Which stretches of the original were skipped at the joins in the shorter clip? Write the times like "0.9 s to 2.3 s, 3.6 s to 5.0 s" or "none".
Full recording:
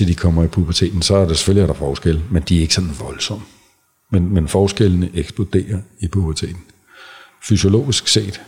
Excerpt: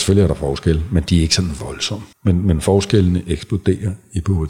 3.5 s to 4.0 s